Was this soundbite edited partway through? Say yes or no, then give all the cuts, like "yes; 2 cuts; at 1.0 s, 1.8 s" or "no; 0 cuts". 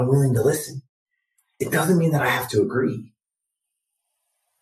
no; 0 cuts